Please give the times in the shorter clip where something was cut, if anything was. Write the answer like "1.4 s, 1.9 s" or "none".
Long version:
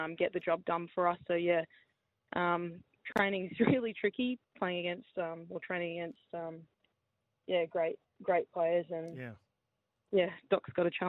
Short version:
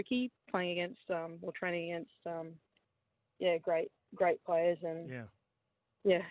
none